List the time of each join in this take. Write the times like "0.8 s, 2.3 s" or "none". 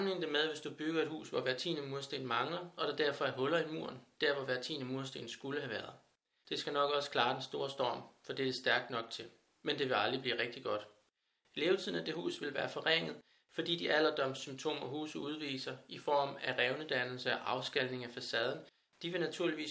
6.4 s